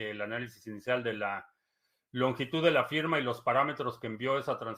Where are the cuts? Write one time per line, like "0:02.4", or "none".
none